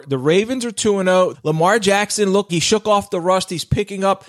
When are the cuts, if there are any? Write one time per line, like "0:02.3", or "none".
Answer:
0:01.3
0:02.5

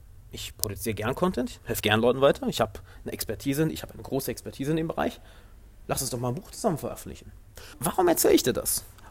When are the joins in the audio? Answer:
none

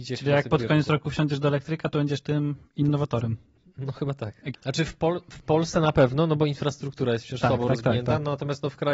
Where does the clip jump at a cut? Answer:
0:04.5

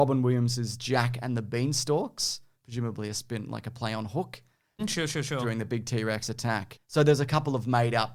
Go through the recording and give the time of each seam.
0:04.8

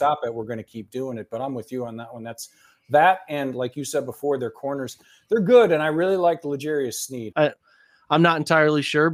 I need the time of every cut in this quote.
0:07.3

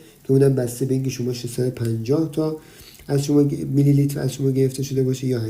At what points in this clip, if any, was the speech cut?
none

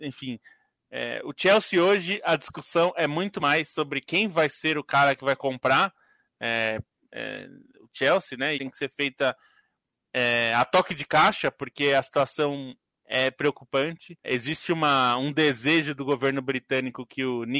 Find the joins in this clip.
0:08.5
0:14.2

